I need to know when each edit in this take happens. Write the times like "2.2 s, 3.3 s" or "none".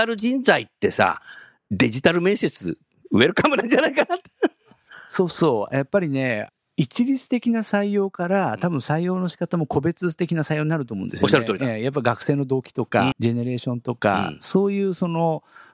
13.1 s